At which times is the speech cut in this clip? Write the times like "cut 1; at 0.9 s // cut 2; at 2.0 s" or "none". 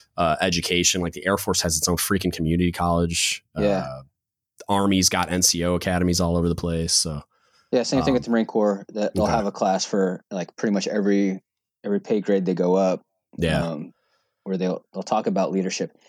none